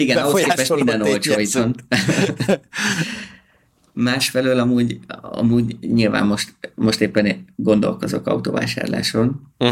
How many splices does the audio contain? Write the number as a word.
zero